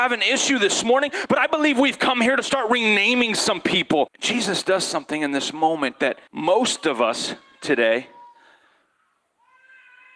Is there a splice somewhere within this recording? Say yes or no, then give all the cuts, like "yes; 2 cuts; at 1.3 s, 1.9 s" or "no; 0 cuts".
yes; 2 cuts; at 4.1 s, 6.3 s